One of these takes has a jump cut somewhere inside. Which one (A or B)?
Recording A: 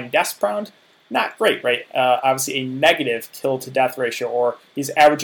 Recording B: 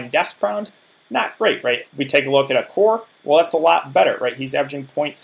B